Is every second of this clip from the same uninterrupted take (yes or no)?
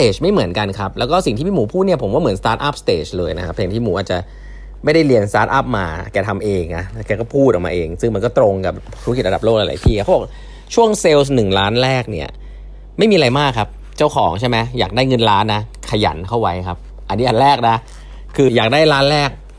no